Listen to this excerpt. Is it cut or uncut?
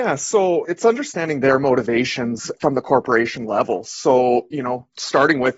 uncut